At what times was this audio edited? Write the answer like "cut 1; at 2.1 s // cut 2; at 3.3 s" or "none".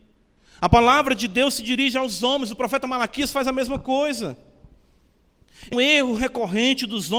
cut 1; at 5.7 s